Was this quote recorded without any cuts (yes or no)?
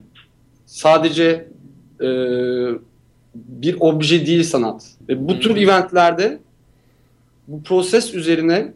no